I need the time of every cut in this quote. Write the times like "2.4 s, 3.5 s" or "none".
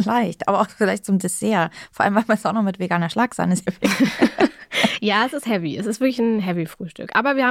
none